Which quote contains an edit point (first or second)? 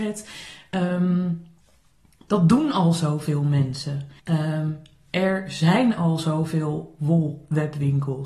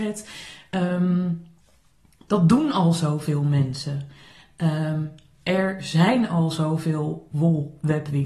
first